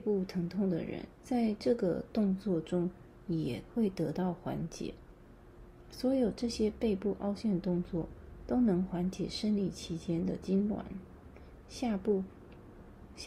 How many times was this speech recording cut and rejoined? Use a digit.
1